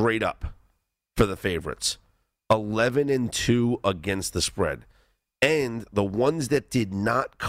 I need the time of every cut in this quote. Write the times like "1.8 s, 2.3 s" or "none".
none